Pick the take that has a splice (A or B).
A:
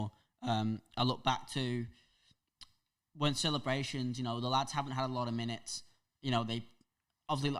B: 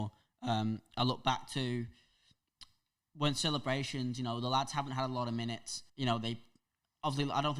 B